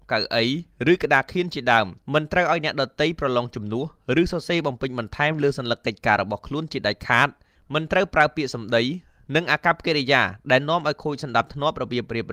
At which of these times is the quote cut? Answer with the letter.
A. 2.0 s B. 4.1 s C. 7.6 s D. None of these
A